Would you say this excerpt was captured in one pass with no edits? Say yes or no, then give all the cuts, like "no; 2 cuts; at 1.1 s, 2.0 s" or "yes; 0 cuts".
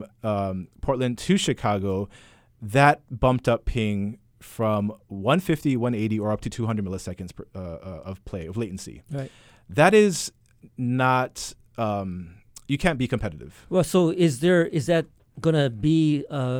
yes; 0 cuts